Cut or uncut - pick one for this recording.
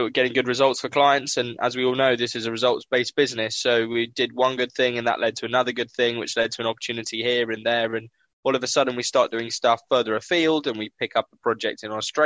uncut